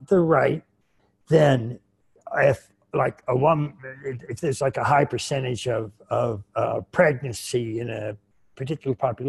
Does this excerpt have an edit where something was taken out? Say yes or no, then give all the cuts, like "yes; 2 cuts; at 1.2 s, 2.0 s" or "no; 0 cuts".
no; 0 cuts